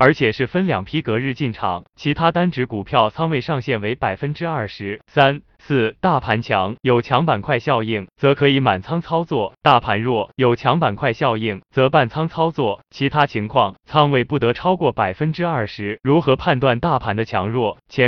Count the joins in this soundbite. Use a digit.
1